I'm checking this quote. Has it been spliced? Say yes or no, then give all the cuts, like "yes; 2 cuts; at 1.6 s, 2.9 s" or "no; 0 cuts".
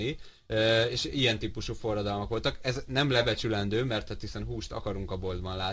no; 0 cuts